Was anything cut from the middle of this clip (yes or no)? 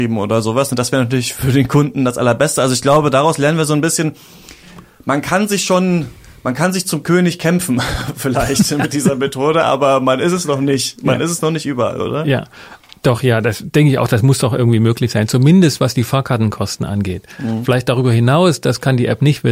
no